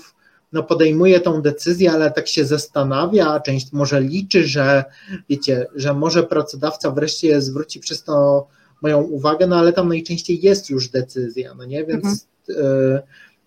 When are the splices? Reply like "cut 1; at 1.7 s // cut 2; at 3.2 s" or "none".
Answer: none